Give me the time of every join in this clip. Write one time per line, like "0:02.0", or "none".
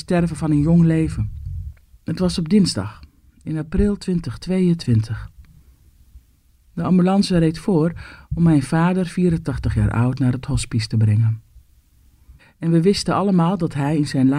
0:01.9
0:12.4

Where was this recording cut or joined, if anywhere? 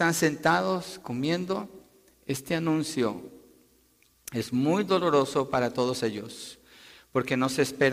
none

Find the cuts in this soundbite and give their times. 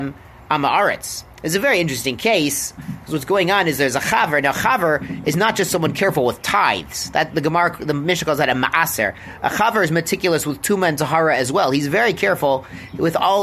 0:02.8

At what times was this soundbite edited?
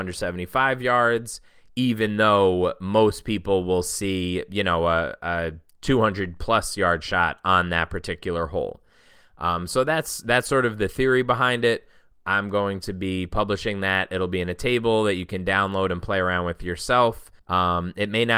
0:17.4

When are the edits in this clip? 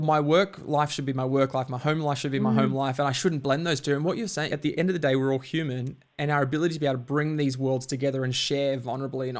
0:04.5

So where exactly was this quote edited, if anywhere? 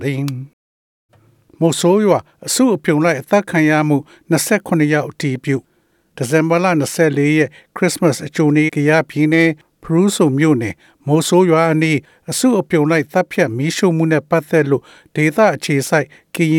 0:08.7

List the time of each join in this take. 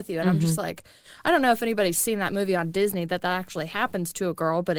none

